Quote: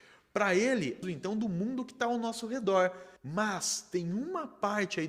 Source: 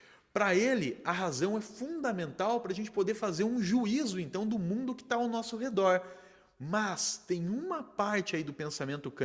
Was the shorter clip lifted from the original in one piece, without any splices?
no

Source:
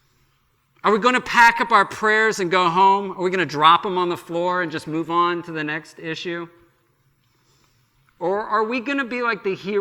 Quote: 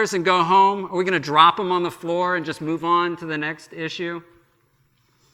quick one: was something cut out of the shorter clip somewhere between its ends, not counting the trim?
no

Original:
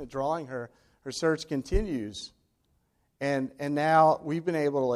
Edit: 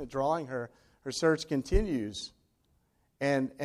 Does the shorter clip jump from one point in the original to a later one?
no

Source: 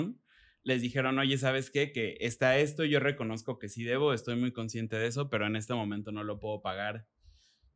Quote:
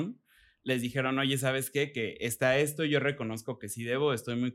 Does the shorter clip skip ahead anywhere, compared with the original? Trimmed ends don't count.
no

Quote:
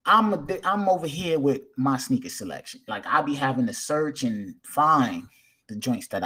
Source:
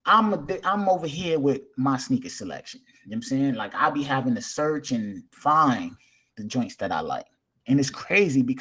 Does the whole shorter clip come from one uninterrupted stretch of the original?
no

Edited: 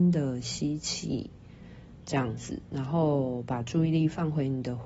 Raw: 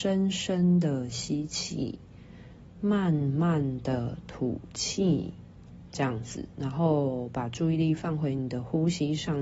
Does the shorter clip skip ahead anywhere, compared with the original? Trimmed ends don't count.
yes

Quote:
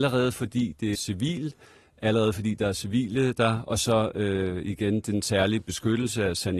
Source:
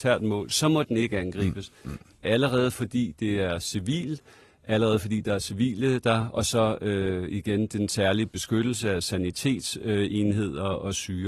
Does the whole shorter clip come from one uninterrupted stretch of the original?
no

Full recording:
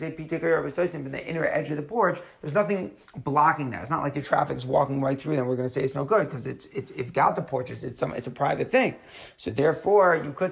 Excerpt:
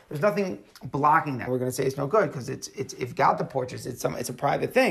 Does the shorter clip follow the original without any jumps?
no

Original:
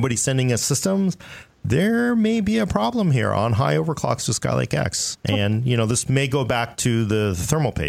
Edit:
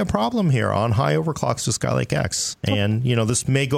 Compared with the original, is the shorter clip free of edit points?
yes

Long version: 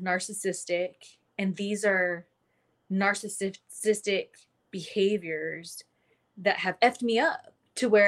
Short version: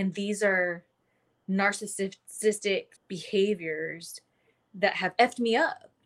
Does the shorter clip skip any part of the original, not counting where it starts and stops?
yes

